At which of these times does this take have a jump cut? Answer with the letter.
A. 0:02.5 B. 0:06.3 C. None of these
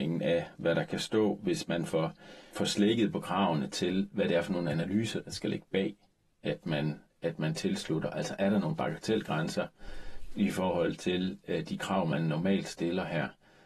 A